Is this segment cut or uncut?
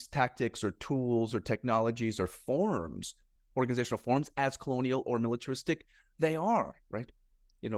uncut